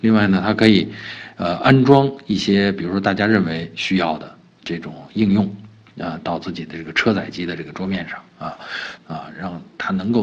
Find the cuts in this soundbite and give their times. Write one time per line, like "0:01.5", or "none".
0:09.0